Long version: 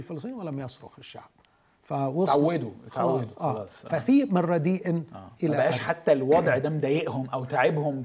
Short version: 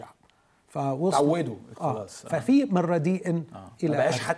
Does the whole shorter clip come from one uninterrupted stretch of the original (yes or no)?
no